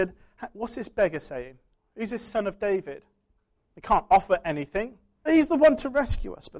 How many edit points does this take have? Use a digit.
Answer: 2